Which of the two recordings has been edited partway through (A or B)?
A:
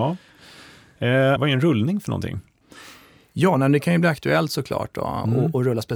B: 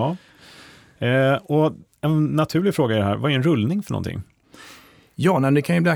A